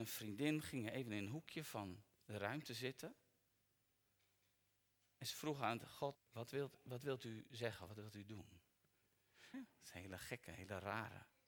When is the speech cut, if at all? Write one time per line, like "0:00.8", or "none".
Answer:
0:02.1
0:06.1
0:09.5